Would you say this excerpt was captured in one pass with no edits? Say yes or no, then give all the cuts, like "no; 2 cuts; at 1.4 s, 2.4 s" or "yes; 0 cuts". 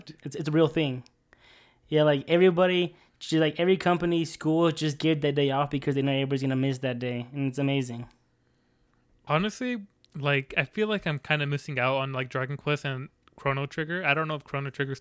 yes; 0 cuts